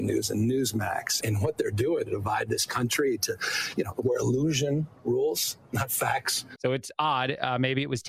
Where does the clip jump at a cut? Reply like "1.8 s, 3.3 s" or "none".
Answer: 1.2 s, 6.6 s